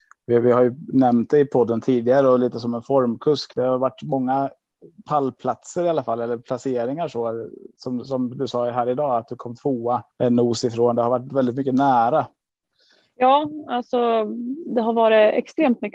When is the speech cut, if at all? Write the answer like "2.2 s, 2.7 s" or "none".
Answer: 10.1 s